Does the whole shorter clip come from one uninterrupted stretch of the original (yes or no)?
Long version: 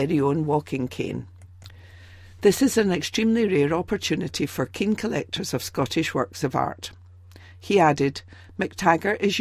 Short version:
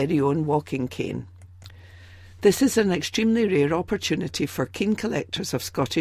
yes